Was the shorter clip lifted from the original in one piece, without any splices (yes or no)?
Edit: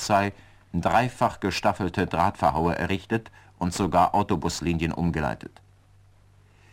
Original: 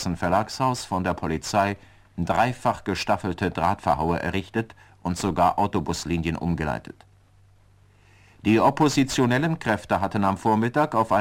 yes